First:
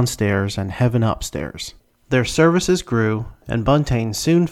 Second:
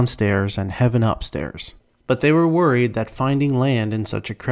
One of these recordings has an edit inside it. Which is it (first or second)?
second